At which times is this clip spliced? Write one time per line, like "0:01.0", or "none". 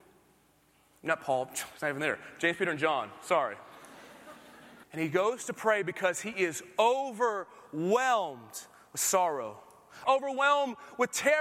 0:04.8
0:10.0